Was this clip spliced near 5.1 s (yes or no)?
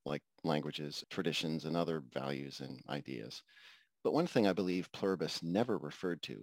no